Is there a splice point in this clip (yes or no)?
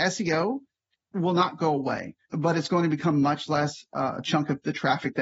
yes